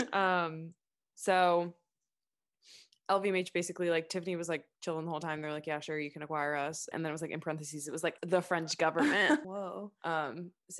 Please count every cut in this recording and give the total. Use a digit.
3